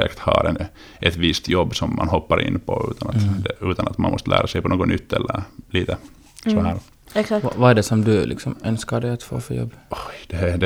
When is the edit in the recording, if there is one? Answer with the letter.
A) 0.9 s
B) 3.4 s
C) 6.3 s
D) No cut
D